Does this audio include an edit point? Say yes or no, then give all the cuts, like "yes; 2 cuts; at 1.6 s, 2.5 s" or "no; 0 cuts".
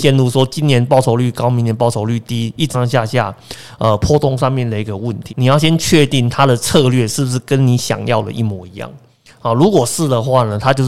yes; 2 cuts; at 2.7 s, 5.3 s